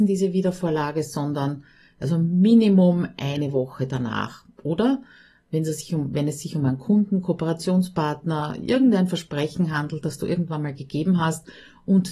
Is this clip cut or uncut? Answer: uncut